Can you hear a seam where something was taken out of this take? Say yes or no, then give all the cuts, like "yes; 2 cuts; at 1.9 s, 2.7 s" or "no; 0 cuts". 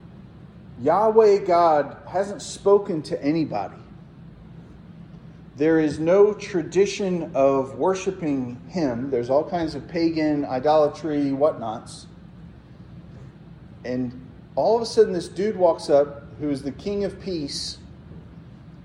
no; 0 cuts